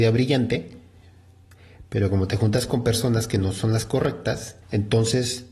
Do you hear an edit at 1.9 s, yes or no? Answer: no